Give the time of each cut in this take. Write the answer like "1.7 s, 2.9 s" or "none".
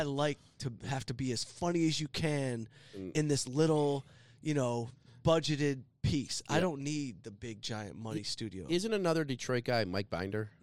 none